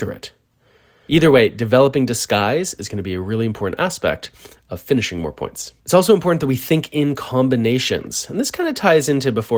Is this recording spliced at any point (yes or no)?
yes